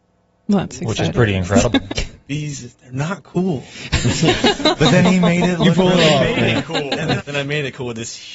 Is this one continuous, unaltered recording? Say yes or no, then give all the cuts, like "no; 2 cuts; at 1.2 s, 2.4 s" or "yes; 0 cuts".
no; 2 cuts; at 1.9 s, 7.2 s